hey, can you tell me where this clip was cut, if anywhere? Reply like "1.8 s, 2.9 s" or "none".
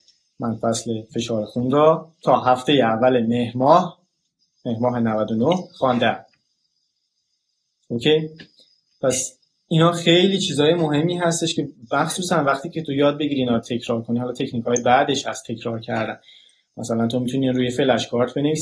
none